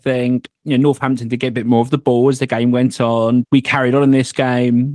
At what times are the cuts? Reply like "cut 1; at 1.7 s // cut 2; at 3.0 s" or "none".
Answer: cut 1; at 3.4 s

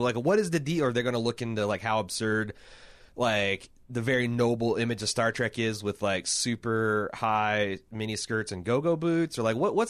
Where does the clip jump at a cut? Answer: none

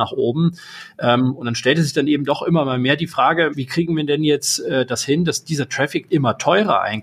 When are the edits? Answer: cut 1; at 3.5 s // cut 2; at 6.1 s

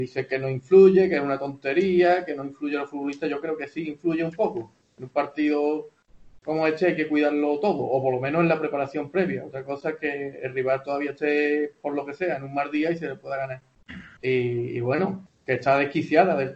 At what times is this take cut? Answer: cut 1; at 14.2 s // cut 2; at 15.3 s

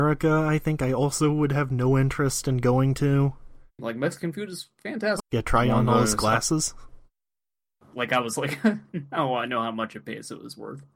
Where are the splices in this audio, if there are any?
cut 1; at 3.8 s // cut 2; at 5.2 s // cut 3; at 7.9 s

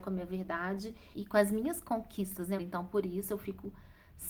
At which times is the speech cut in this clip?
cut 1; at 1.1 s // cut 2; at 2.6 s

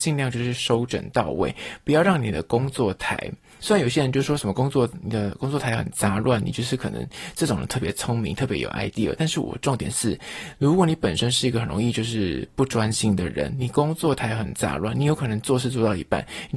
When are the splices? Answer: cut 1; at 3.6 s

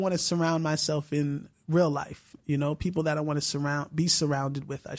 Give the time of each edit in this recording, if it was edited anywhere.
cut 1; at 1.5 s

